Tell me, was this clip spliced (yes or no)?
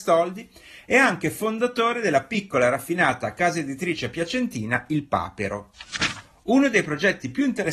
no